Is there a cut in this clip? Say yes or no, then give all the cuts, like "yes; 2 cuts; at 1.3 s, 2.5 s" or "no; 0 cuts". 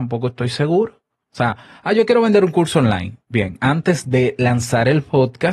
yes; 1 cut; at 1.2 s